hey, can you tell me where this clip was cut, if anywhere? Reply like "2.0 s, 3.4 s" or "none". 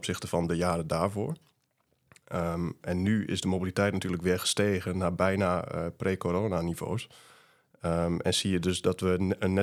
none